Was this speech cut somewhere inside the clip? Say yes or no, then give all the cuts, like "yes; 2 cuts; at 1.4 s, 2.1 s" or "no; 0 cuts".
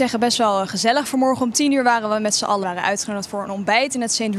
yes; 1 cut; at 2.6 s